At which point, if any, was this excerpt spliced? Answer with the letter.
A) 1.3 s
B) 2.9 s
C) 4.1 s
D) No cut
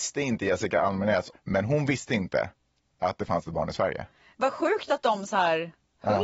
A